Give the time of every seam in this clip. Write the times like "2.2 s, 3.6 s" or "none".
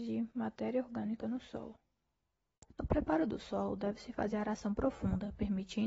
2.7 s

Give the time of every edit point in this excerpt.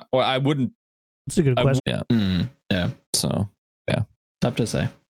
1.8 s, 3.0 s

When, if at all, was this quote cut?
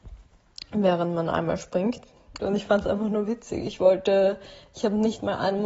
2.4 s

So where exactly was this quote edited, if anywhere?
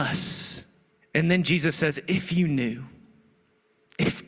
1.0 s

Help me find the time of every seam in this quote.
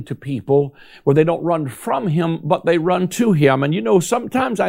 none

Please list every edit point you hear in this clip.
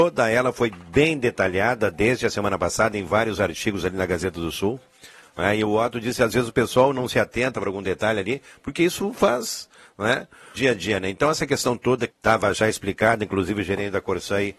10.5 s, 12.1 s

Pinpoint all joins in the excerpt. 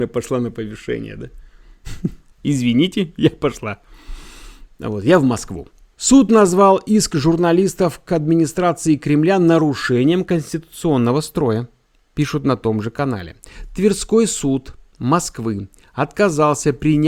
2.3 s, 5.9 s

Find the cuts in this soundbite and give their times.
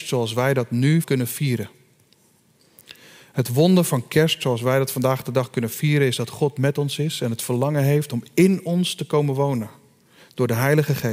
1.0 s

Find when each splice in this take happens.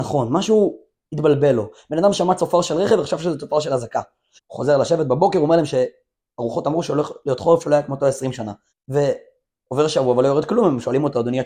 4.4 s, 8.7 s

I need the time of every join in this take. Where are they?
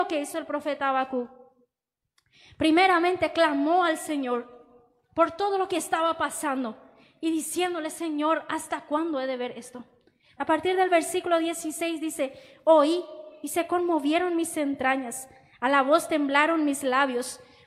10.4 s

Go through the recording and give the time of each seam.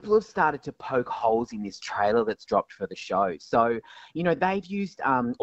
none

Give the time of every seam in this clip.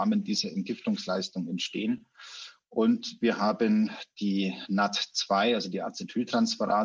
none

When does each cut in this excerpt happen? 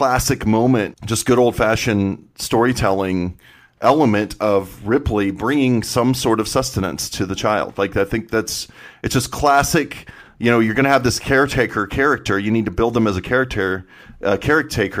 0.9 s

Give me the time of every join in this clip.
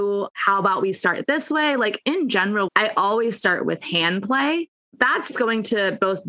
2.7 s, 5.3 s

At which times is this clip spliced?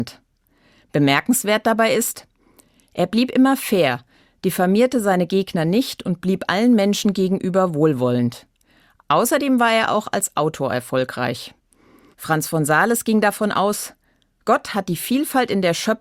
12.1 s

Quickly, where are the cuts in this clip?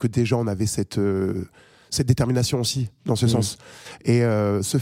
none

